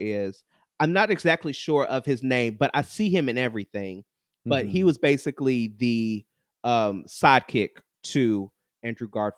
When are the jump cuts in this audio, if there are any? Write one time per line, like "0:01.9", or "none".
none